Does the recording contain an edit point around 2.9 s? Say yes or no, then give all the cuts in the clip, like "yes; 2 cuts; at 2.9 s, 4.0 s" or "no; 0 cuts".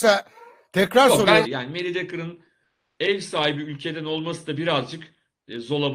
no; 1 cut; at 1.4 s